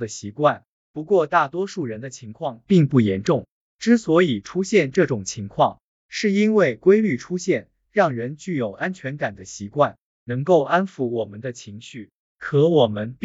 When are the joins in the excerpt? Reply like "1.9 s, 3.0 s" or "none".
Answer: 3.6 s